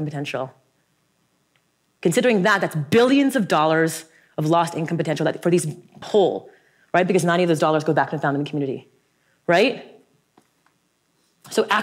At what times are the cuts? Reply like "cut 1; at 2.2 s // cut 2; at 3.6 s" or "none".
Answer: cut 1; at 2.0 s // cut 2; at 6.0 s